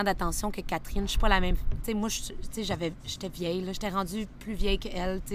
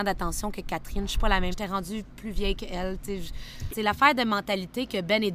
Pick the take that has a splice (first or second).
second